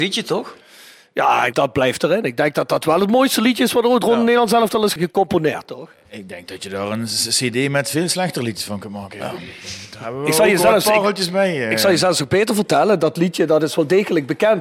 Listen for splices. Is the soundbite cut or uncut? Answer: uncut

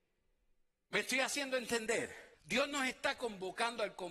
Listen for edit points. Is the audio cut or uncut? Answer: cut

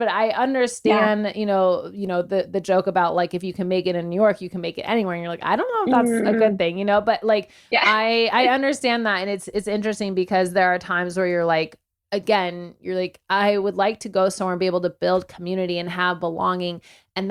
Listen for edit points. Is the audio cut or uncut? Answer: uncut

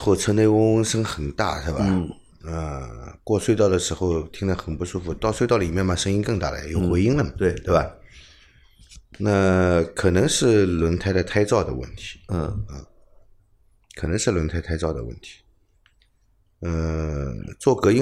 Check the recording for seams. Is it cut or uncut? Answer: uncut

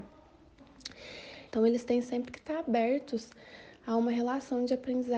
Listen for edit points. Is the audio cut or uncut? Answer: cut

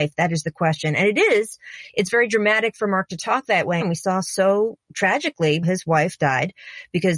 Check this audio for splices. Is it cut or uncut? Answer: cut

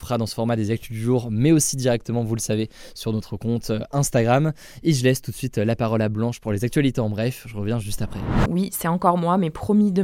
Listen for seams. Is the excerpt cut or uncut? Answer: cut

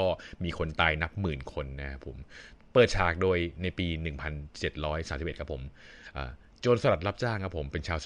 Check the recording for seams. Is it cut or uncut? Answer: uncut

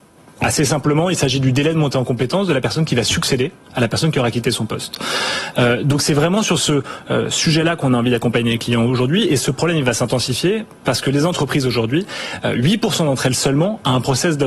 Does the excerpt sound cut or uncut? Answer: uncut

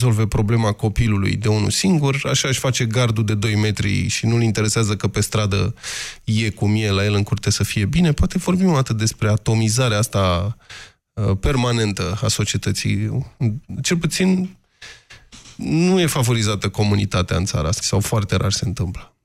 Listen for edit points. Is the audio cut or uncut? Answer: cut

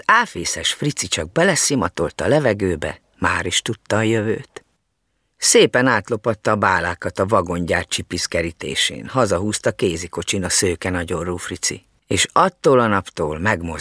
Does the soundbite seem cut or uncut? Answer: uncut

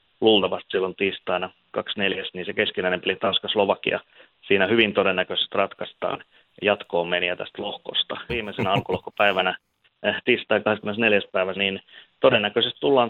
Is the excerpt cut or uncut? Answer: cut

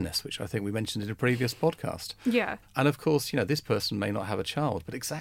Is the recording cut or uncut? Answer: cut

